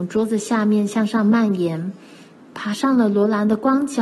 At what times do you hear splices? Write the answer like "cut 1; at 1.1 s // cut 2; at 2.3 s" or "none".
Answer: none